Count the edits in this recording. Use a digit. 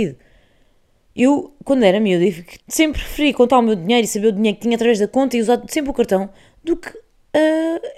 1